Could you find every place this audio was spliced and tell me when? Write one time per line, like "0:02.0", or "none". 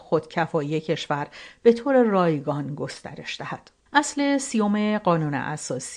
0:03.9